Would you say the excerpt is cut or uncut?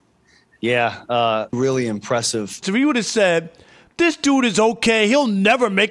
cut